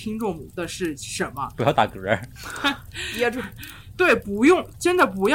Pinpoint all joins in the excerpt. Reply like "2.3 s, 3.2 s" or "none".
none